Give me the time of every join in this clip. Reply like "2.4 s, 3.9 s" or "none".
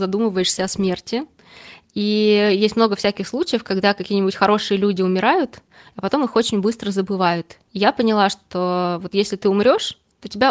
7.7 s